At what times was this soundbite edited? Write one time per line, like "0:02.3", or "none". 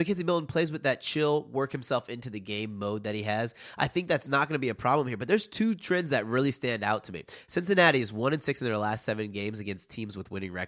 none